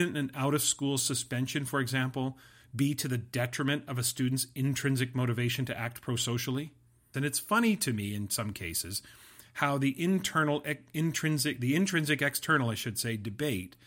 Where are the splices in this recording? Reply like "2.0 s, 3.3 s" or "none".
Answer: 7.1 s